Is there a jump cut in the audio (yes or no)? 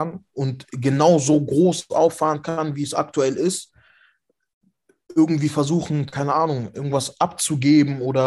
no